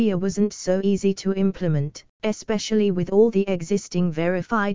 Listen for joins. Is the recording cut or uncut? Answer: uncut